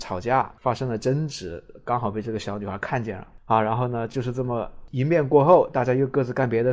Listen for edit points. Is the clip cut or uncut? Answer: uncut